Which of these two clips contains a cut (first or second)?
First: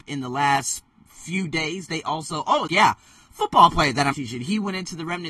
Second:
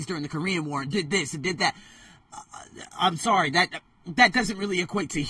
first